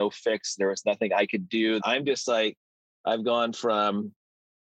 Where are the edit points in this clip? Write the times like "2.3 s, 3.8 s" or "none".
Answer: 1.8 s